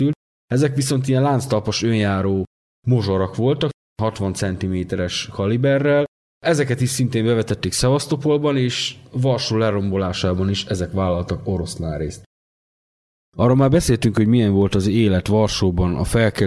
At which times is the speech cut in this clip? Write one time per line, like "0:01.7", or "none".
none